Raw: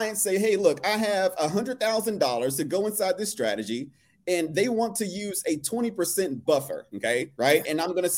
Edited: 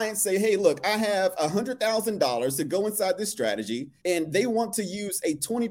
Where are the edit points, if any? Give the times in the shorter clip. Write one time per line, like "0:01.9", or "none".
0:04.0